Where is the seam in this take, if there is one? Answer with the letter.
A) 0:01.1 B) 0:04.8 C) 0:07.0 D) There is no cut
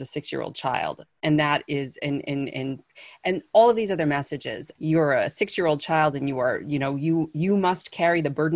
B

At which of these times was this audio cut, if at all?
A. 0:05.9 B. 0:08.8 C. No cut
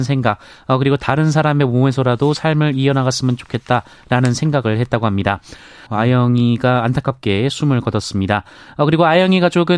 A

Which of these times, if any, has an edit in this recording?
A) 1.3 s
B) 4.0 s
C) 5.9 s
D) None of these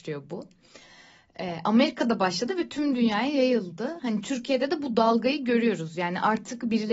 D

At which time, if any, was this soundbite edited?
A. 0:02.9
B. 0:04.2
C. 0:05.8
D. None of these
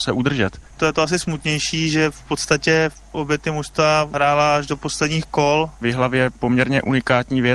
C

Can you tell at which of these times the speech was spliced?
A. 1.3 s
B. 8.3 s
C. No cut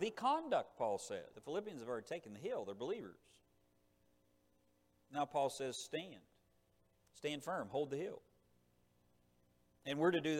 A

